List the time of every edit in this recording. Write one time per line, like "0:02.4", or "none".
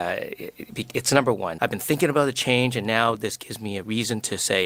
0:01.6